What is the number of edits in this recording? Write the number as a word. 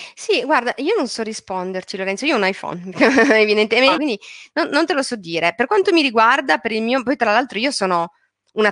one